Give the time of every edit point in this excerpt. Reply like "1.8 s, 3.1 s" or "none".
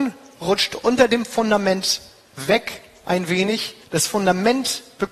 3.8 s